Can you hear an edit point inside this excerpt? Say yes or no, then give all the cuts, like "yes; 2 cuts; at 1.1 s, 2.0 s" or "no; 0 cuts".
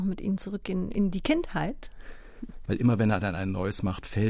yes; 1 cut; at 2.7 s